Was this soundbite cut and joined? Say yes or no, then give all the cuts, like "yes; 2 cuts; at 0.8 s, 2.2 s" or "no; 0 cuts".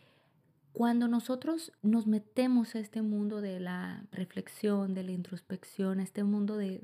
no; 0 cuts